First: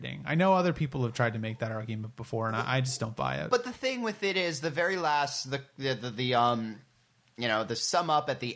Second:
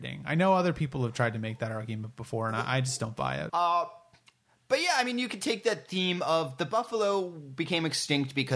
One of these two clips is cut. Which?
second; 1 cut; at 3.5 s

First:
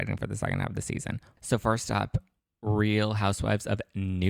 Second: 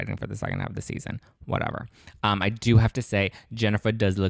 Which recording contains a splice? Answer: first; 1 cut; at 1.4 s

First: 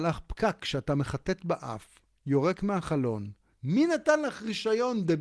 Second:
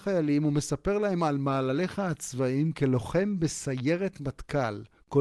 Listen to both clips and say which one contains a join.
first; 1 cut; at 3.6 s

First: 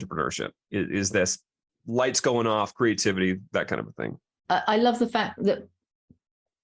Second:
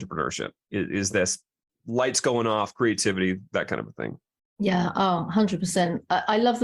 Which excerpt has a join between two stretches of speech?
first; 1 cut; at 4.4 s

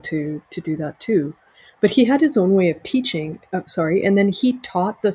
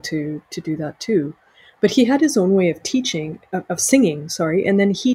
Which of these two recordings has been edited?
first; 1 cut; at 3.7 s

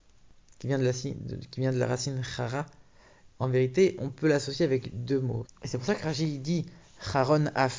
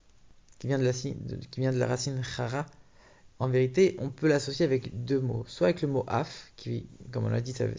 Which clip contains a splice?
first; 1 cut; at 5.5 s

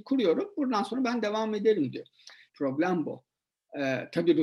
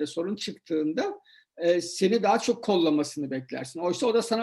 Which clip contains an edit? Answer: first; 1 cut; at 2.5 s

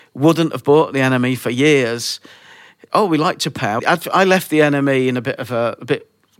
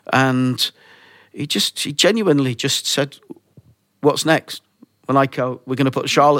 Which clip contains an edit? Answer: first; 1 cut; at 3.8 s

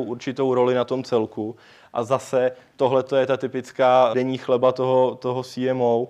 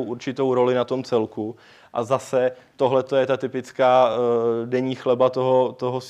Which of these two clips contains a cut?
first; 1 cut; at 4.1 s

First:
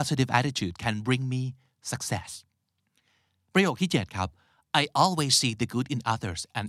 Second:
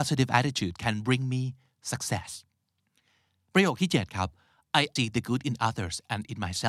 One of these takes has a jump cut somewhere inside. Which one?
second; 1 cut; at 5.0 s

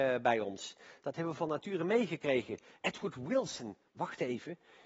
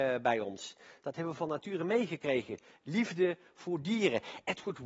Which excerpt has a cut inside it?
first; 1 cut; at 2.8 s

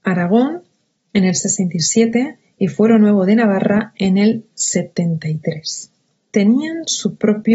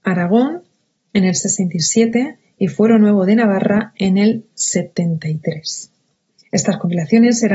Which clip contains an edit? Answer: first; 1 cut; at 6.1 s

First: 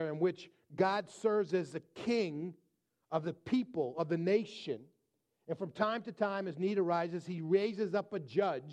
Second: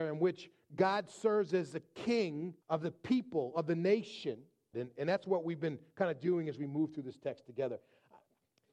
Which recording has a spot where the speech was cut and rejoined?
second; 2 cuts; at 2.6 s, 4.7 s

